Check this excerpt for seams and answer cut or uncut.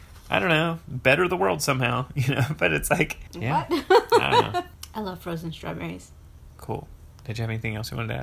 uncut